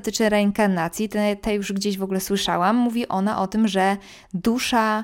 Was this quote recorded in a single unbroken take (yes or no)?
yes